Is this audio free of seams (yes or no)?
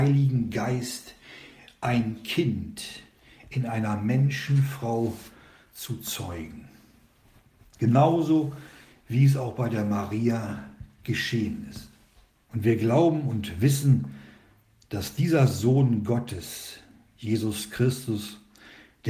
no